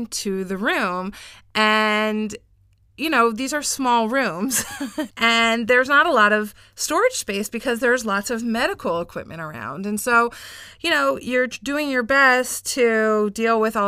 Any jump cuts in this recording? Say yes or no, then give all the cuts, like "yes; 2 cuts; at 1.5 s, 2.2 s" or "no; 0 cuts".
no; 0 cuts